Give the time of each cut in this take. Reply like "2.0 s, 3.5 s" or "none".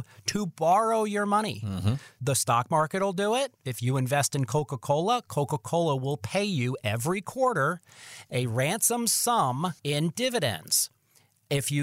9.8 s